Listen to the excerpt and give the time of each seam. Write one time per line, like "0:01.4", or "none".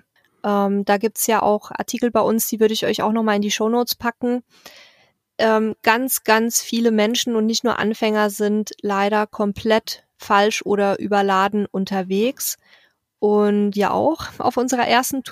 0:13.7